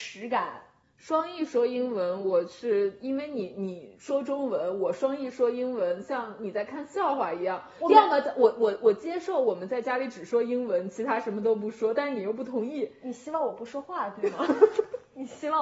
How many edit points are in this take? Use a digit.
0